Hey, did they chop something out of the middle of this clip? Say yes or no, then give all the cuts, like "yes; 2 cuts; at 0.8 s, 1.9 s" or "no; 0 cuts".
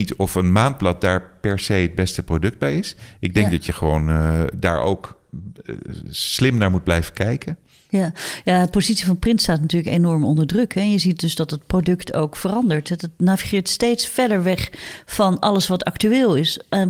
no; 0 cuts